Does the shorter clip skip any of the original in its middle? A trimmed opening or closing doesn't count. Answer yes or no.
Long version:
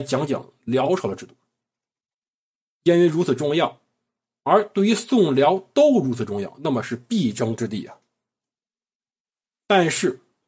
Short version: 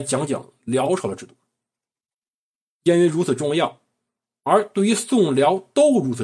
no